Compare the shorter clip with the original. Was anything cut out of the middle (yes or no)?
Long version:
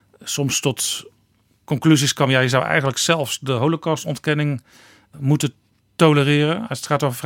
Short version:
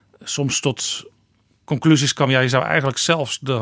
no